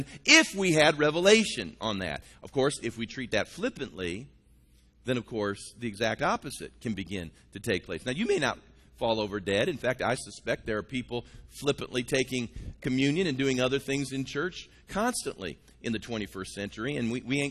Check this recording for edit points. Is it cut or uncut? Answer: uncut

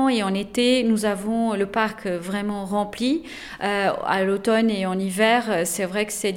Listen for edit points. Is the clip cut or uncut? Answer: uncut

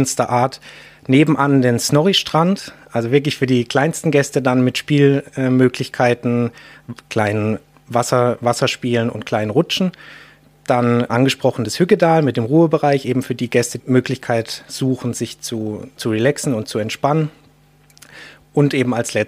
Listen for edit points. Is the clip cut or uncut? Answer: cut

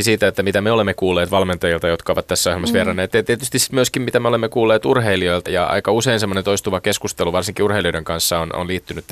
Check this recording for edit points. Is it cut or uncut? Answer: cut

